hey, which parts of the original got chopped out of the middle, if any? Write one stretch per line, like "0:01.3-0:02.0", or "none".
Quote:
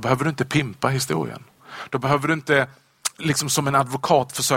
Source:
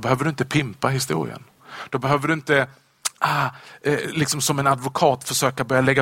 0:03.2-0:04.1